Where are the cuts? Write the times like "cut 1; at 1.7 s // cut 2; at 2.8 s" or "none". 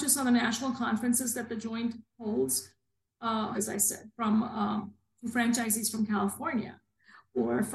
cut 1; at 3.5 s